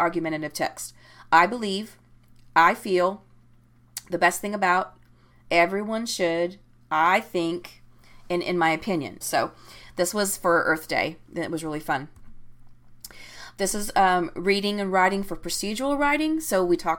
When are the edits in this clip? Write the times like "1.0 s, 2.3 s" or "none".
5.3 s, 9.2 s